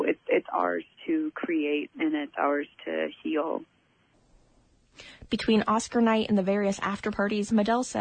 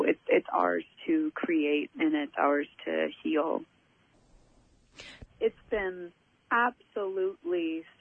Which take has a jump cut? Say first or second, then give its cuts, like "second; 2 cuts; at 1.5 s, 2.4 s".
second; 1 cut; at 5.2 s